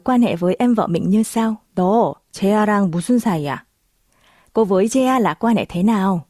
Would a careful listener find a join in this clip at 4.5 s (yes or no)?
no